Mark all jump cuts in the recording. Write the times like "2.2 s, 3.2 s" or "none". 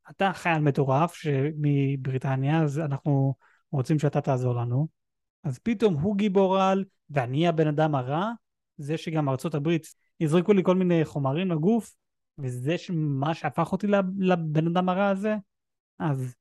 5.3 s